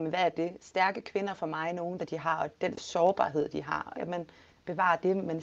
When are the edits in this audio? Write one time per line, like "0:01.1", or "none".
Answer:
0:02.0
0:03.9